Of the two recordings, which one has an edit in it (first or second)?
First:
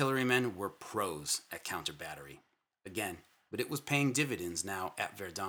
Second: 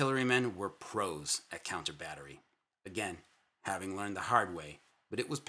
first